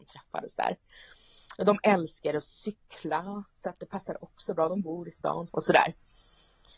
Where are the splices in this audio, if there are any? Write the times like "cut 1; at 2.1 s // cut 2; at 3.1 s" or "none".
cut 1; at 3.8 s // cut 2; at 5.5 s